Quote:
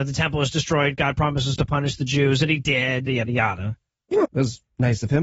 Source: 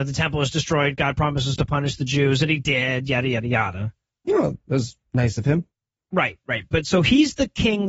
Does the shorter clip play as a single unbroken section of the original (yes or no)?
no